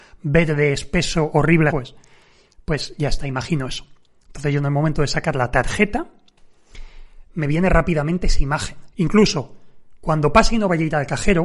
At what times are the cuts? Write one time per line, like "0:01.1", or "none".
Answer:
0:01.7
0:08.9